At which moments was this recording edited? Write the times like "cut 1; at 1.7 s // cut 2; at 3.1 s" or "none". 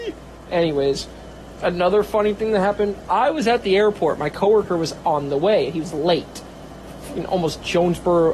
cut 1; at 1.6 s